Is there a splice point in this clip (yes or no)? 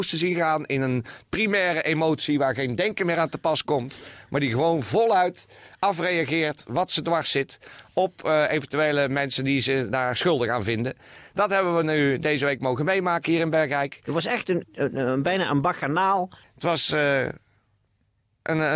yes